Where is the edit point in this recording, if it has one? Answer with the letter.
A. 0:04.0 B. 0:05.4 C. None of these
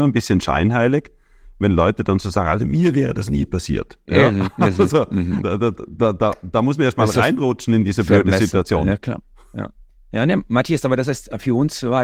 B